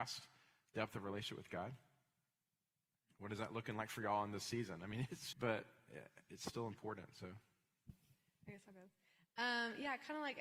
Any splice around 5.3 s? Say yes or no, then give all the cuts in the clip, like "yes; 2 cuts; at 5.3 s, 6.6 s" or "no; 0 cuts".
yes; 1 cut; at 5.3 s